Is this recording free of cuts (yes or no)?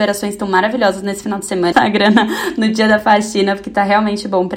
no